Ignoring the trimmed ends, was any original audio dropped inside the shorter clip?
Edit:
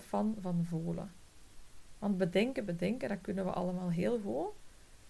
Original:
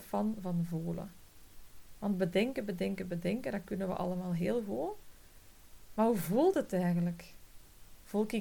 yes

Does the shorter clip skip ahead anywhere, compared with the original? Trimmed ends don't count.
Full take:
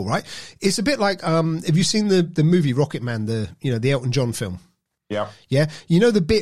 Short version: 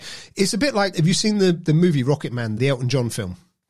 yes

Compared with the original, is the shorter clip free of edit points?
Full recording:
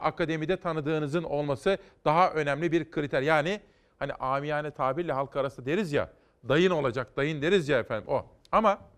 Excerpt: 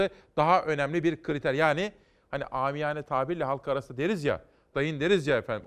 no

